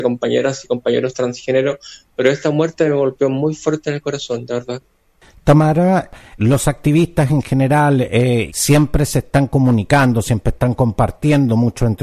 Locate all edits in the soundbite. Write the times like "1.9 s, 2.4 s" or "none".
6.4 s, 8.5 s